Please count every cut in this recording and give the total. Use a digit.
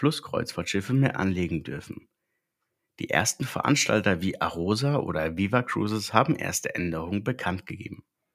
0